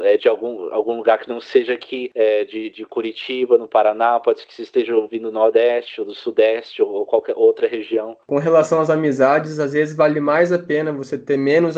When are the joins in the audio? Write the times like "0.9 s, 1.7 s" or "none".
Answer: 8.2 s